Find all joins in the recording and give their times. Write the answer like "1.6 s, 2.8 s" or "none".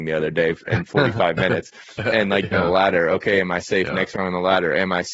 2.5 s